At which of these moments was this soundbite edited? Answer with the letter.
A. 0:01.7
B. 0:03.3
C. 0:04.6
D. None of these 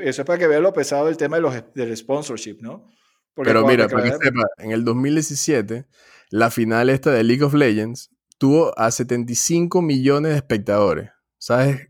C